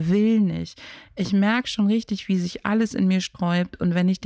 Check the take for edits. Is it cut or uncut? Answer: uncut